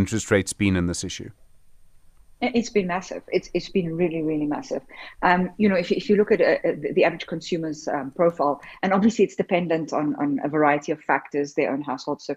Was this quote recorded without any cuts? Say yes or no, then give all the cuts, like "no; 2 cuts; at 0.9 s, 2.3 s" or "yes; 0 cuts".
yes; 0 cuts